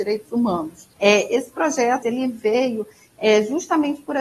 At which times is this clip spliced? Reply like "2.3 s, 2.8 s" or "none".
0.9 s, 2.0 s